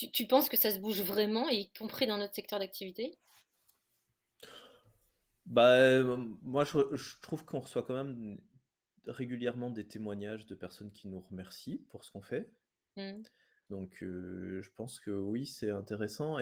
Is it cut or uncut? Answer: cut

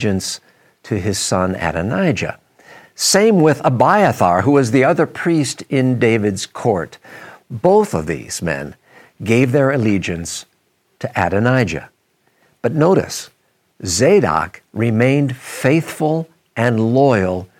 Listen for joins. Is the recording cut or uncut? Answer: uncut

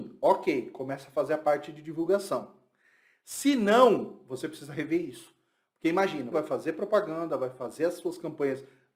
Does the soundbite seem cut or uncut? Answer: cut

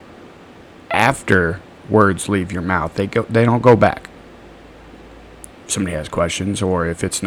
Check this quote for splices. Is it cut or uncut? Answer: cut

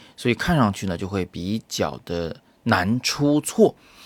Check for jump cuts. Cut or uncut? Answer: uncut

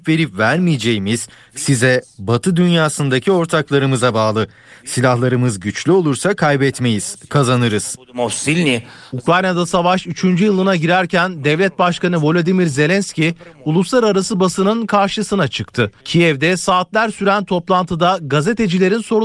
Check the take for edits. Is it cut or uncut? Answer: cut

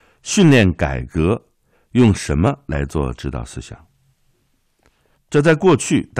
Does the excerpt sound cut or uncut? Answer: cut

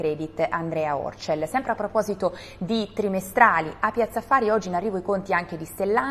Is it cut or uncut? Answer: uncut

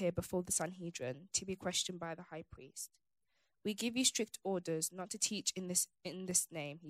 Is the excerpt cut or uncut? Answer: uncut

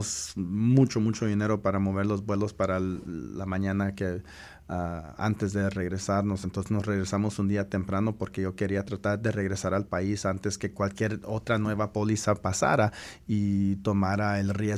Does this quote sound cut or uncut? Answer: uncut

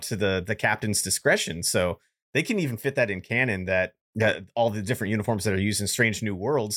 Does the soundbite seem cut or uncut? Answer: cut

